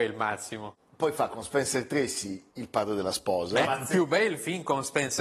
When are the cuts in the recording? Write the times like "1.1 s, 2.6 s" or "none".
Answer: 2.5 s, 3.6 s